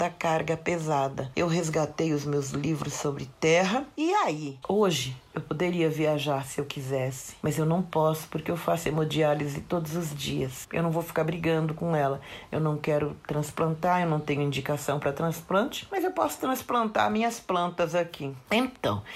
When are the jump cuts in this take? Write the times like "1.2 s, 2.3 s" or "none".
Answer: 1.3 s, 4.6 s, 10.6 s